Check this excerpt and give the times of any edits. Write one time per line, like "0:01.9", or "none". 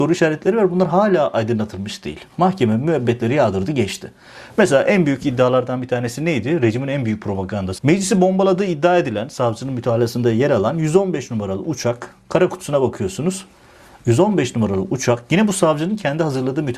0:07.8